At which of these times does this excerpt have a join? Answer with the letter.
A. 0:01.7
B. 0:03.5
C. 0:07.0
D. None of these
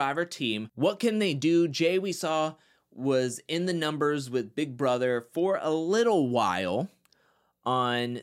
D